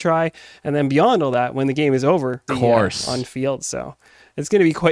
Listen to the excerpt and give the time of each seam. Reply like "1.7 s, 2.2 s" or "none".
2.5 s